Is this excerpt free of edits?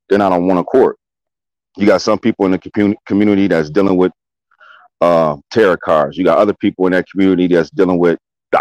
yes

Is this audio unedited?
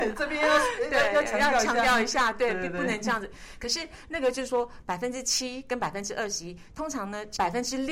yes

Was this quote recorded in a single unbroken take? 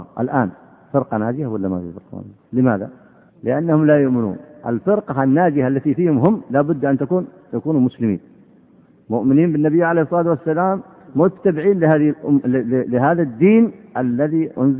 no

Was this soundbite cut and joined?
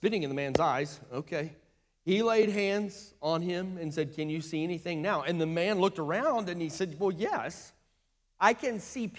no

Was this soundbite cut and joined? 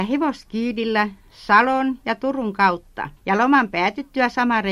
yes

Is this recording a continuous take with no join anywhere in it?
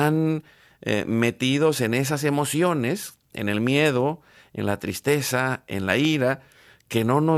yes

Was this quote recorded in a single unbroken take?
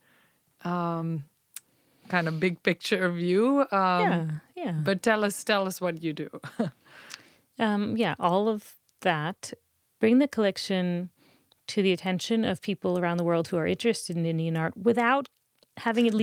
no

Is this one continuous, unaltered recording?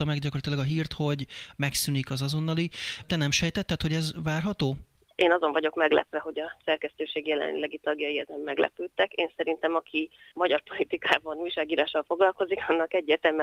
no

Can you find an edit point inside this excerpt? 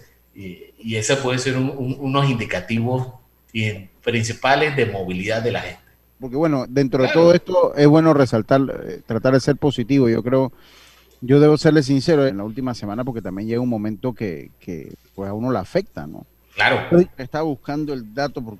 yes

